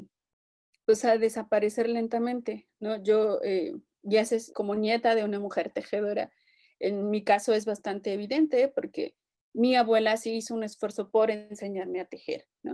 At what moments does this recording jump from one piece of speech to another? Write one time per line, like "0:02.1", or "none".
0:04.5